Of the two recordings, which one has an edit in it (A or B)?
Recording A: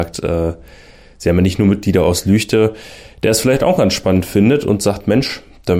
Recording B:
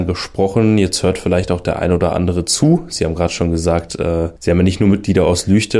B